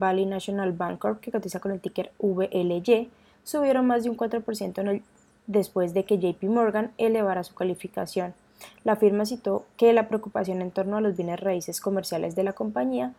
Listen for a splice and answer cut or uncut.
uncut